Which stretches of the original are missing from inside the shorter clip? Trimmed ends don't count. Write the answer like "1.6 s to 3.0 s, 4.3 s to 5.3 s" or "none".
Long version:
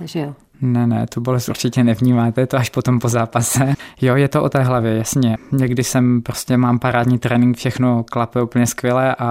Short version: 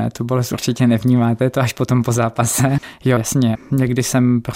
4.1 s to 5.0 s

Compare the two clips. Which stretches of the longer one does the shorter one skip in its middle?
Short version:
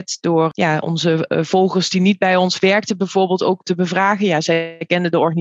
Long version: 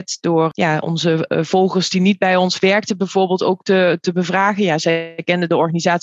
3.6 s to 4.0 s

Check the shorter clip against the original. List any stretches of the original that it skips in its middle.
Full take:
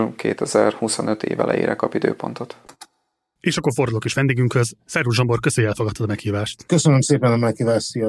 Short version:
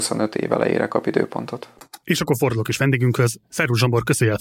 2.9 s to 3.4 s

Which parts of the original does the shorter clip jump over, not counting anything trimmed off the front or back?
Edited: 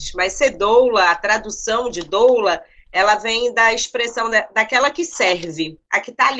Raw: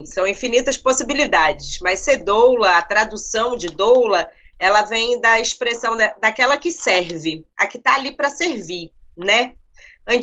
none

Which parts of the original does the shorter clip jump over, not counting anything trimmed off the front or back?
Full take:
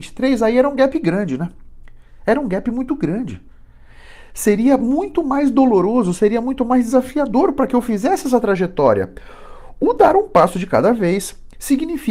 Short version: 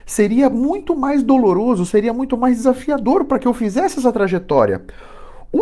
none

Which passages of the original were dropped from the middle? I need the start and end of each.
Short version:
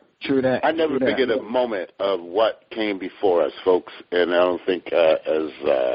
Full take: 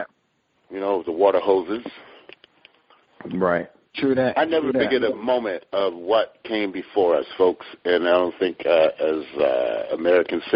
none

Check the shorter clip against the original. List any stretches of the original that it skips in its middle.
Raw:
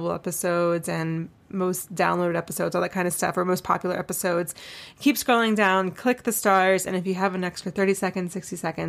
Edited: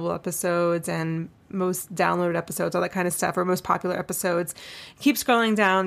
none

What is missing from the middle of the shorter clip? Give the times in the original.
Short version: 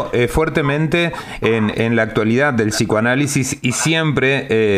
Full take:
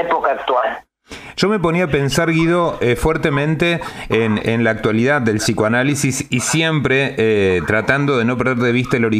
none

